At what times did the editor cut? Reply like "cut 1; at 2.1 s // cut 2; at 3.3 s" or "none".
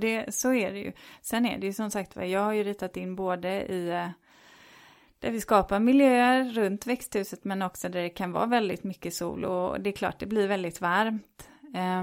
none